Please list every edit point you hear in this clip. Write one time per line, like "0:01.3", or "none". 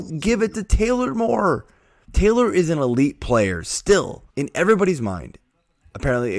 0:02.0
0:04.3